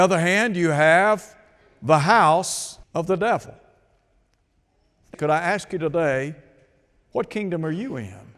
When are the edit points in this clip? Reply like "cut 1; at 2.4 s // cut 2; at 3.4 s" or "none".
cut 1; at 2.8 s // cut 2; at 5.1 s